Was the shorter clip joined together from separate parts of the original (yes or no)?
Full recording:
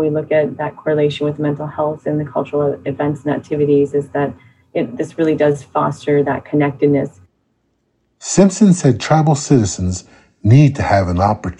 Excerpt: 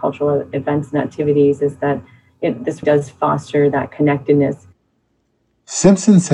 yes